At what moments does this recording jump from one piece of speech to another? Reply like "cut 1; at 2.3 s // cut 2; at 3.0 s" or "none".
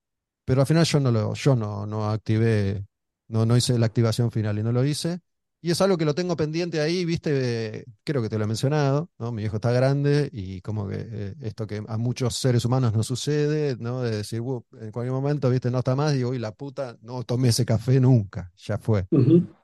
none